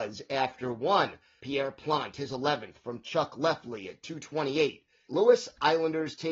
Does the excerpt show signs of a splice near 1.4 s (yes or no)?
yes